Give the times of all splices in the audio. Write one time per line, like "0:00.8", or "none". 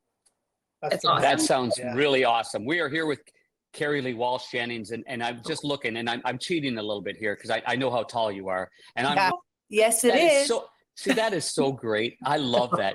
0:09.3

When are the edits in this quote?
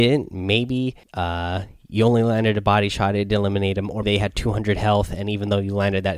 0:01.0
0:04.0

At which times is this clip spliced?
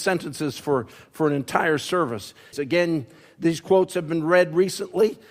0:02.5

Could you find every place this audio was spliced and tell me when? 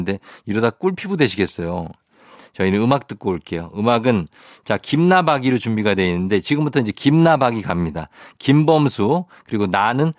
0:02.4

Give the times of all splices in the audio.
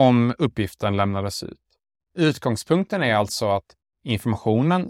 0:02.0

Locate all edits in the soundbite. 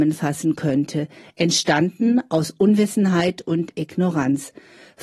none

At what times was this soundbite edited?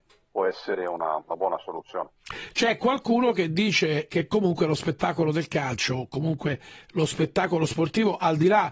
none

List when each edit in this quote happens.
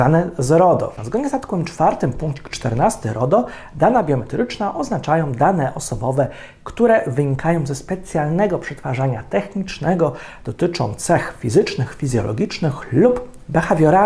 0:01.0

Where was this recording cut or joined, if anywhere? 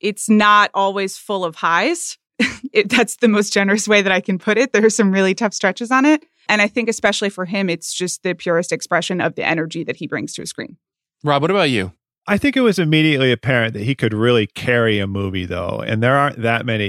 0:06.5

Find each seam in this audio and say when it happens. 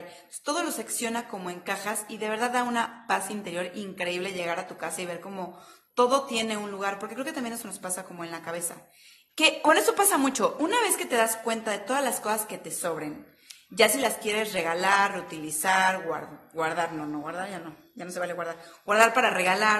0:09.3

